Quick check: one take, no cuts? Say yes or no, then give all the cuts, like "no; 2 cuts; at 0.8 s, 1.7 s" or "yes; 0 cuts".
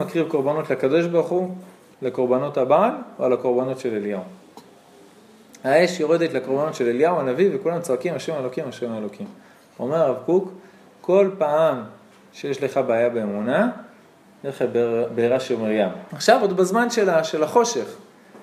no; 2 cuts; at 1.9 s, 16.1 s